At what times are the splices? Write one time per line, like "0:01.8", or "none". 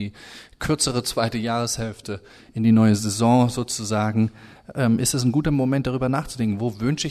none